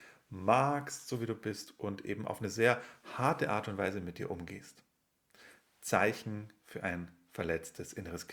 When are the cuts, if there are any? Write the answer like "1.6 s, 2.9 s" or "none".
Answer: none

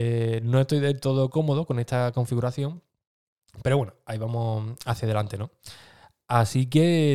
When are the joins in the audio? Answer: none

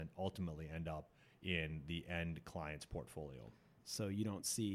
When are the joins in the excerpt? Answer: 3.8 s

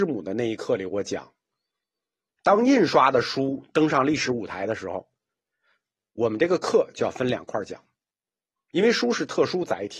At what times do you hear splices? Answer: none

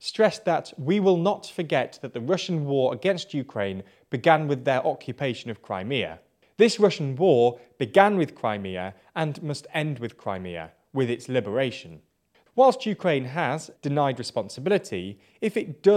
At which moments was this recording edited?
12.4 s, 13.7 s

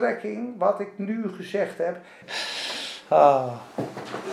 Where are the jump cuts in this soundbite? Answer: 2.2 s

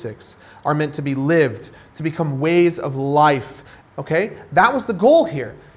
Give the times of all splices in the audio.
1.9 s, 3.8 s

